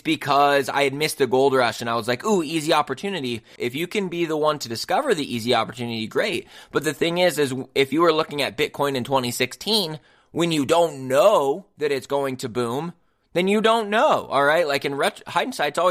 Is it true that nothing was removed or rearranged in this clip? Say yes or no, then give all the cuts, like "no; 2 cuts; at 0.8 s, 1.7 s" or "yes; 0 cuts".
no; 1 cut; at 3.6 s